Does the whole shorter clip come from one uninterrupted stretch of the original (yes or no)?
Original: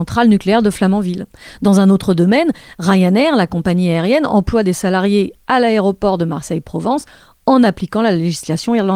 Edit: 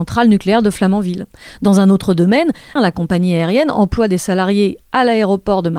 no